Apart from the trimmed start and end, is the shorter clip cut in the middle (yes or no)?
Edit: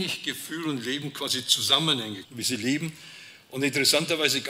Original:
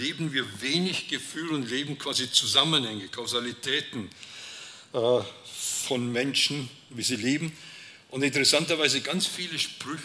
yes